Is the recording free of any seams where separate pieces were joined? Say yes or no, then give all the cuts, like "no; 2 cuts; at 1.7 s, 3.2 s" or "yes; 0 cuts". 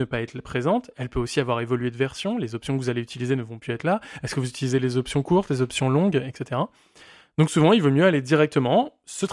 yes; 0 cuts